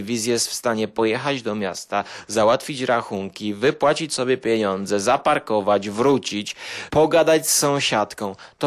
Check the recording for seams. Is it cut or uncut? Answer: uncut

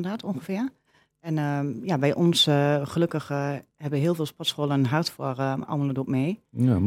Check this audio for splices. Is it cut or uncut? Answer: uncut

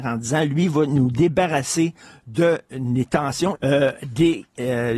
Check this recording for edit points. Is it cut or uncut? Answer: cut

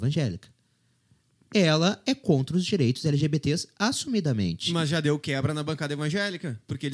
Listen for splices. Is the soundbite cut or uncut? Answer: uncut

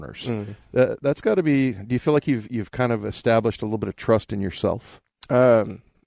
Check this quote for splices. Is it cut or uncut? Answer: uncut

